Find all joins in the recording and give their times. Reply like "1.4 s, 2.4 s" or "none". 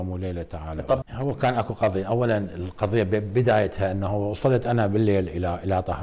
1.0 s